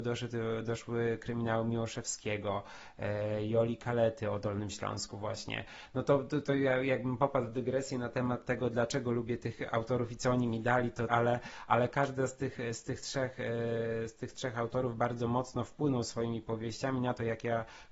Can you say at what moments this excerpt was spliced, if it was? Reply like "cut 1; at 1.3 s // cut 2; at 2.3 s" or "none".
cut 1; at 11.1 s